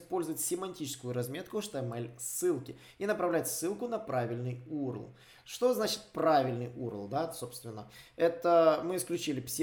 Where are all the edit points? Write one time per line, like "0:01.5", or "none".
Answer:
none